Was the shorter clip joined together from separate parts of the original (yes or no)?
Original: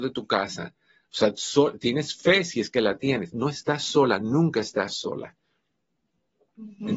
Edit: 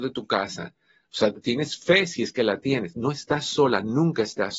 yes